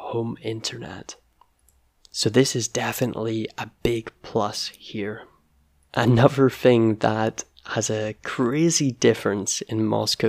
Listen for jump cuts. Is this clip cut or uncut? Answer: uncut